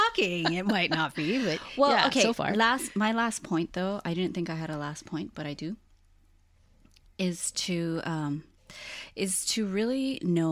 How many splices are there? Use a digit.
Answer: 0